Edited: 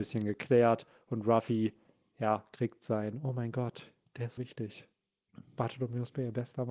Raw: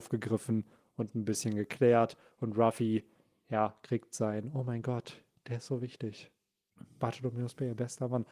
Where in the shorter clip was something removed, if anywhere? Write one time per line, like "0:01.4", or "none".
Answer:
0:04.4